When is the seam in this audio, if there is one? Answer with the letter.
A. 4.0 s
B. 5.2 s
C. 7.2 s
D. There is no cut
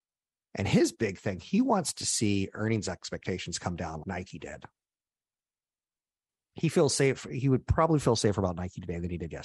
A